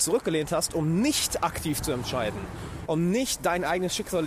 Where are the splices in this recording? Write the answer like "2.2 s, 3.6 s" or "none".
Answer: 2.9 s